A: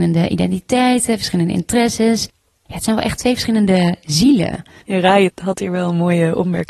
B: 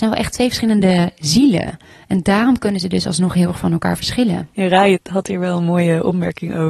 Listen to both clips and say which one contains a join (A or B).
A